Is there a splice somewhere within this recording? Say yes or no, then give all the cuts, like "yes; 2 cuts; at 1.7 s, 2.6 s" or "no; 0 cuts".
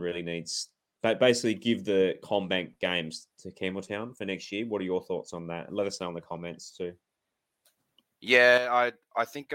no; 0 cuts